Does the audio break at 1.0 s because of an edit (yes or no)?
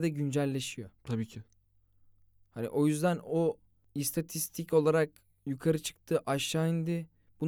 yes